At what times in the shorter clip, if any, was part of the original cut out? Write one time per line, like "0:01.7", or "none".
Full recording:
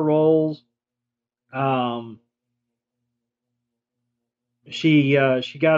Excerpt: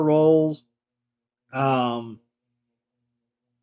none